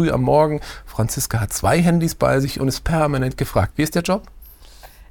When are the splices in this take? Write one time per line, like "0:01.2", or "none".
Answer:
0:03.7